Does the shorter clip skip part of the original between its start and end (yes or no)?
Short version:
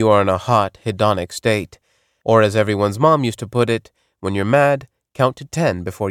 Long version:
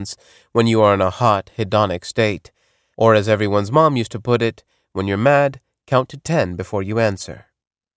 no